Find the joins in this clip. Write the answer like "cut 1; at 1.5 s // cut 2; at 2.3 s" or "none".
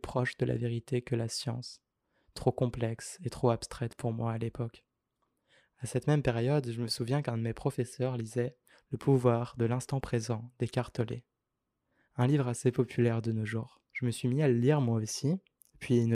cut 1; at 13.9 s